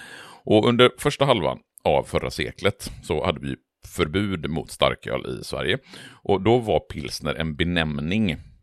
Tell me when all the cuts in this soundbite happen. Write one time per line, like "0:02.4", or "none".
none